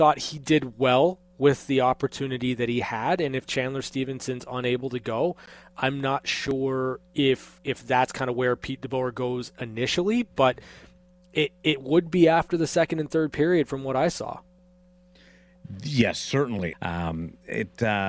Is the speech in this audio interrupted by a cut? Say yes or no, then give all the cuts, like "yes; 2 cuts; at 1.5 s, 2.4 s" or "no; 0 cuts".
yes; 1 cut; at 16.7 s